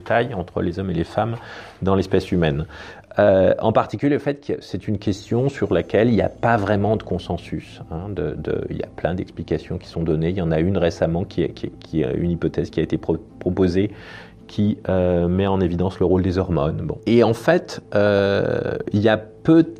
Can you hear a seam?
no; 0 cuts

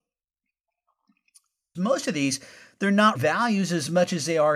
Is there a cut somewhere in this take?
yes; 2 cuts; at 1.7 s, 3.1 s

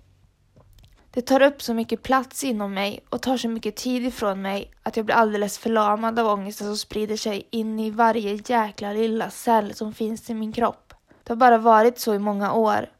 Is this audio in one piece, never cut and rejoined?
no; 2 cuts; at 1.0 s, 11.2 s

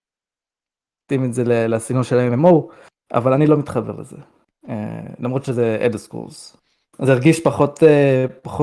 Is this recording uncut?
no; 1 cut; at 6.8 s

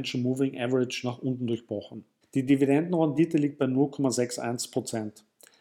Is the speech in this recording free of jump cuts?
no; 1 cut; at 2.2 s

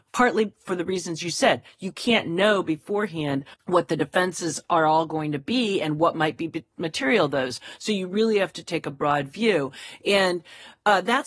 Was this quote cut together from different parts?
no; 0 cuts

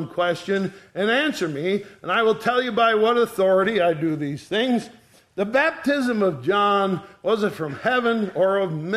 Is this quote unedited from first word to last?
yes; 0 cuts

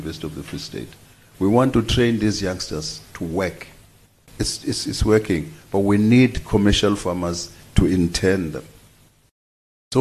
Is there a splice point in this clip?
yes; 1 cut; at 4.2 s

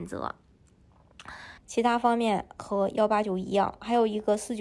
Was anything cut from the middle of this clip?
yes; 1 cut; at 1.6 s

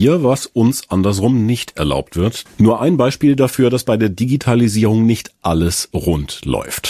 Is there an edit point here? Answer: yes; 1 cut; at 2.5 s

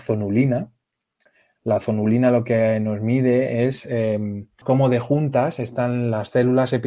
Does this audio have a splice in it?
yes; 1 cut; at 4.6 s

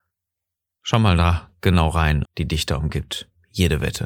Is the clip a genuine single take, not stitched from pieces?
no; 1 cut; at 2.2 s

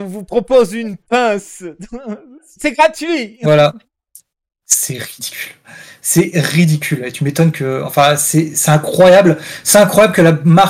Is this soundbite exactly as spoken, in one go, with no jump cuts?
yes; 0 cuts

